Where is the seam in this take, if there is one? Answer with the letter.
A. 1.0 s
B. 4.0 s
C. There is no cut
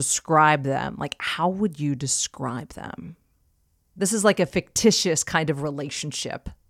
B